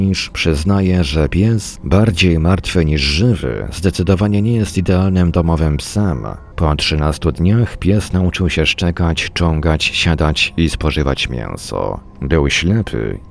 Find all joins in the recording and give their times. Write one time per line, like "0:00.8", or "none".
0:06.5